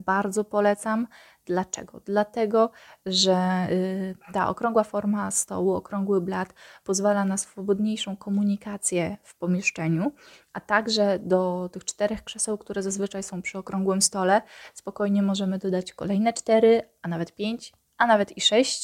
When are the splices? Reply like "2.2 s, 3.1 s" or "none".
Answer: none